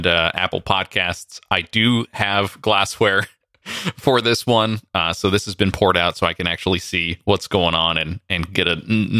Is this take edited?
no; 0 cuts

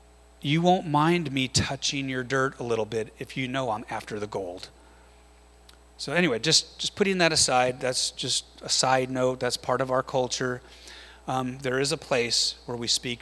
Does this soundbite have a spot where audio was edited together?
no; 0 cuts

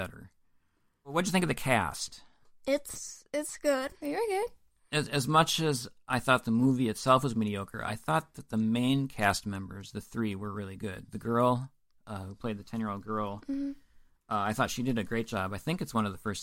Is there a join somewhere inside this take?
no; 0 cuts

